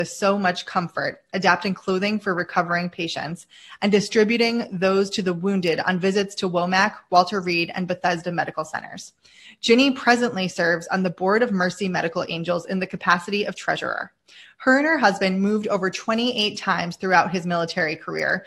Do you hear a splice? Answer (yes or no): no